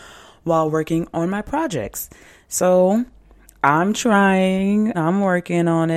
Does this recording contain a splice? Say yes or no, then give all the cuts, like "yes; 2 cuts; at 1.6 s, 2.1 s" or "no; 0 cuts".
yes; 1 cut; at 4.9 s